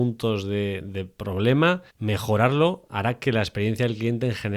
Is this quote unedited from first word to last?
no; 1 cut; at 1.9 s

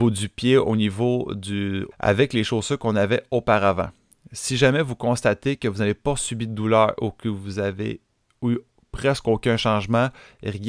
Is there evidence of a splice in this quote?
yes; 1 cut; at 1.9 s

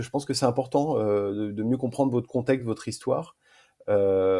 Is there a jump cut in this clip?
no; 0 cuts

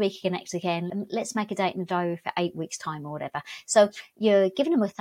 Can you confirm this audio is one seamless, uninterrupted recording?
yes; 0 cuts

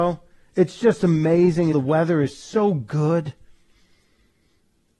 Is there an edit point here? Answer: yes; 1 cut; at 1.7 s

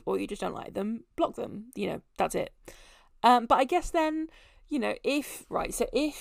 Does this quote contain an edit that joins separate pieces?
no; 0 cuts

